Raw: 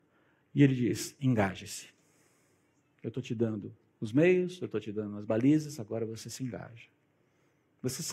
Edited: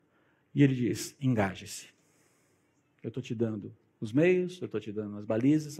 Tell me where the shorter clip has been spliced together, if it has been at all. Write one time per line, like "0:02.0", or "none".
none